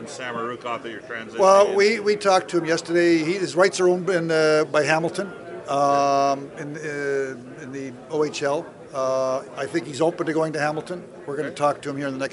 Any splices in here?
no; 0 cuts

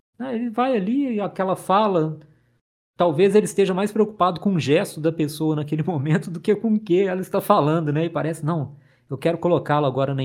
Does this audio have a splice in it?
no; 0 cuts

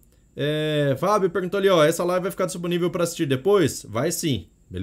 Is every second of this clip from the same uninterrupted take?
yes; 0 cuts

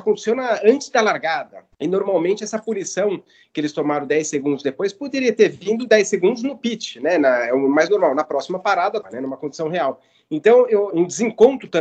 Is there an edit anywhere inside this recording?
yes; 3 cuts; at 1.7 s, 9.0 s, 10.9 s

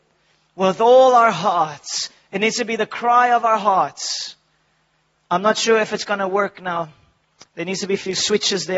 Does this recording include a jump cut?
no; 0 cuts

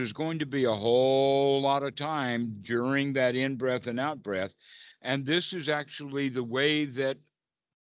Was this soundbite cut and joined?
yes; 1 cut; at 4.9 s

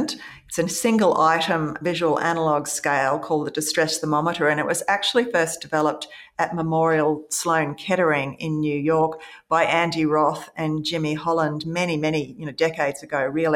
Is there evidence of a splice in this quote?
no; 0 cuts

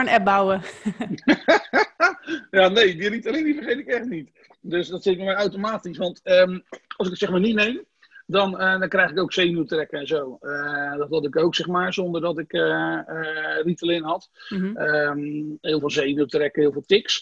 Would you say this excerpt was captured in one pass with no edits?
yes; 0 cuts

